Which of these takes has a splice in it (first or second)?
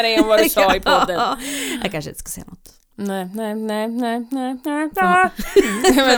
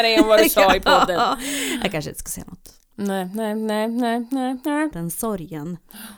second